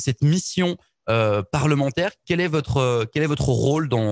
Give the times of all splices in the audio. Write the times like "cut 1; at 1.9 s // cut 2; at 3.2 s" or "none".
cut 1; at 2.2 s

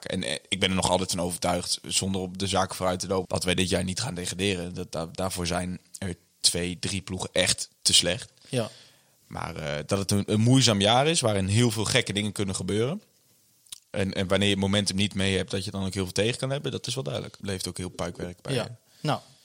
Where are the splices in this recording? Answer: cut 1; at 3.3 s // cut 2; at 17.4 s

